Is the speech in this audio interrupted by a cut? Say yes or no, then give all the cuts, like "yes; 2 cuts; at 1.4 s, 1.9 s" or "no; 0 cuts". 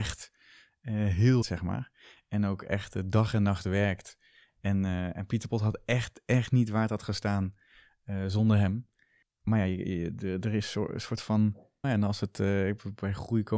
yes; 2 cuts; at 1.4 s, 11.8 s